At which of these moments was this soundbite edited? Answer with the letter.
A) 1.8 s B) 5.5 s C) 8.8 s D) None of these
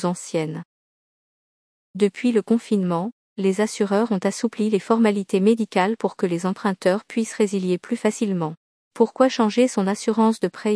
C